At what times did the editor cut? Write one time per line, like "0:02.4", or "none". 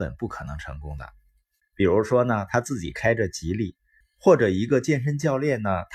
0:01.6
0:04.0